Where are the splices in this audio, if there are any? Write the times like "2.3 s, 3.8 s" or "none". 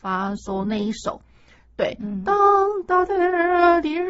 none